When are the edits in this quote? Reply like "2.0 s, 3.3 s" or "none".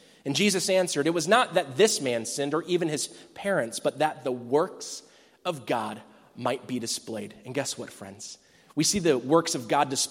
none